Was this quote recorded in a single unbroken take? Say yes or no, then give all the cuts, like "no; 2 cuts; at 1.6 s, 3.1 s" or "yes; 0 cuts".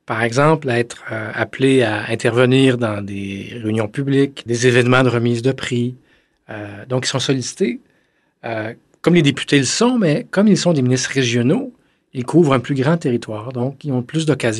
no; 1 cut; at 4.5 s